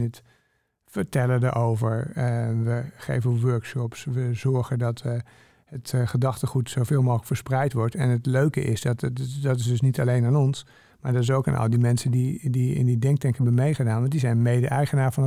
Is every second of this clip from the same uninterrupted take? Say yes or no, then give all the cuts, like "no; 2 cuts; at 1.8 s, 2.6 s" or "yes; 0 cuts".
yes; 0 cuts